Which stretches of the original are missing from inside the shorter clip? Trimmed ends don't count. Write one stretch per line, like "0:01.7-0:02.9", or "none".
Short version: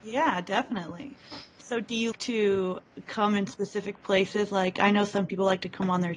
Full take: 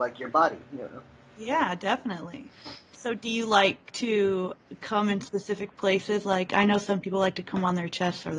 0:03.5-0:03.9